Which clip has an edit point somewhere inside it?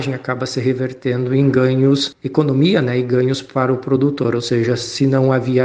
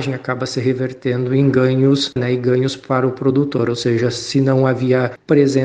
second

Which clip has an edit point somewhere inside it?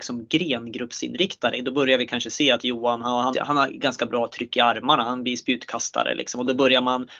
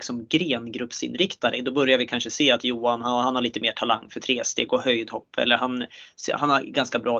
first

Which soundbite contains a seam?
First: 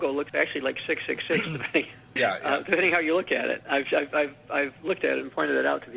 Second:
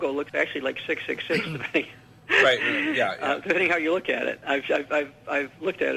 first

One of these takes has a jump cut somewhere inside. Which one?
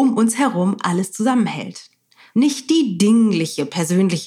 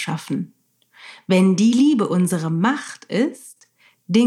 first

